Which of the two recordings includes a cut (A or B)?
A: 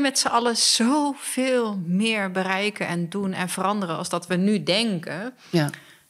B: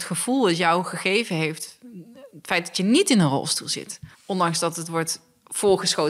B